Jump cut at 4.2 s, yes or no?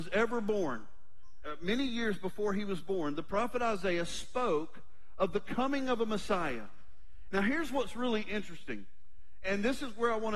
no